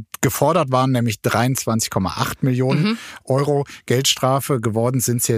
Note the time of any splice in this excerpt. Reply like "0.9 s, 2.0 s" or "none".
none